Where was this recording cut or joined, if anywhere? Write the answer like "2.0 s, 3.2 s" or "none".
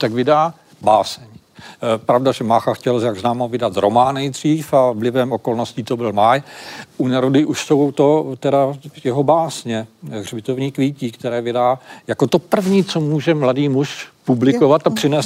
none